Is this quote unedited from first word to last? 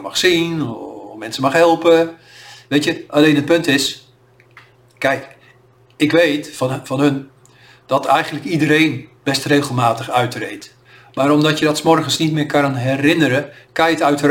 yes; 0 cuts

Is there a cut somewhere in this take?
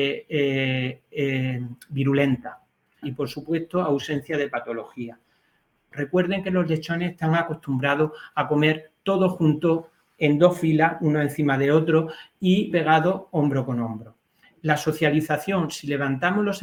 yes; 3 cuts; at 3.0 s, 5.9 s, 12.7 s

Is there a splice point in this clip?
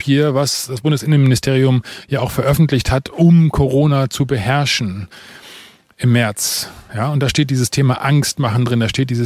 no; 0 cuts

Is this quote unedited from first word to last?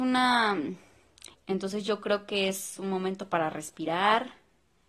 no; 1 cut; at 1.3 s

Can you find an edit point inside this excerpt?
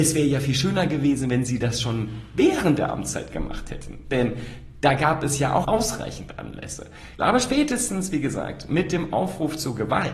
yes; 2 cuts; at 5.6 s, 7.2 s

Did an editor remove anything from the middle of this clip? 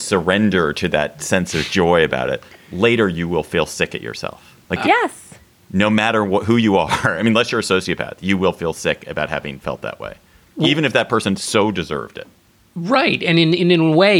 yes; 1 cut; at 4.6 s

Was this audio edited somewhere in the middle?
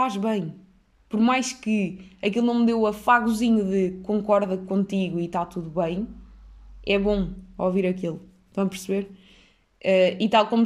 no; 0 cuts

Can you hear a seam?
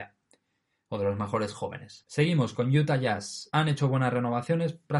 yes; 2 cuts; at 2.0 s, 3.5 s

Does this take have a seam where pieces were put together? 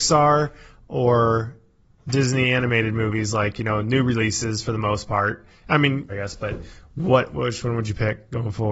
yes; 1 cut; at 6.1 s

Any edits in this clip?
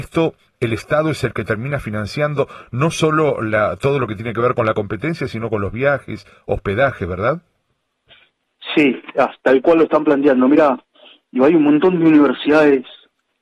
no; 0 cuts

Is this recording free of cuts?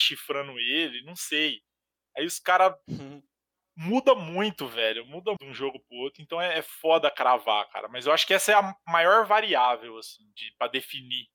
no; 1 cut; at 5.4 s

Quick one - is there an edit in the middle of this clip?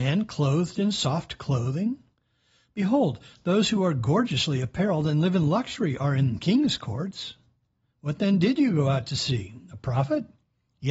no; 0 cuts

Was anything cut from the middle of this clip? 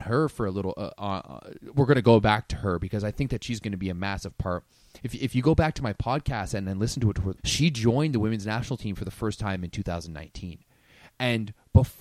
yes; 1 cut; at 7.4 s

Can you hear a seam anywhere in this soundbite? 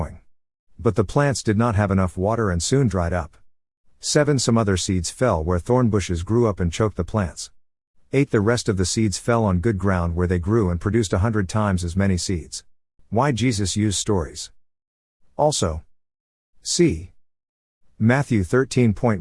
yes; 1 cut; at 13.0 s

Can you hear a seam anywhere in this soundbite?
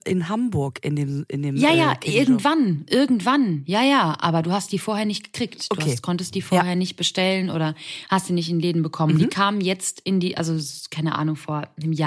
no; 0 cuts

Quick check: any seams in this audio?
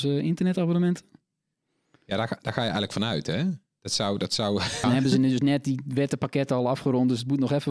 yes; 1 cut; at 4.8 s

